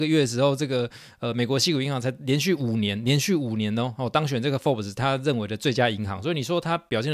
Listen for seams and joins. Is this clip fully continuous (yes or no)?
yes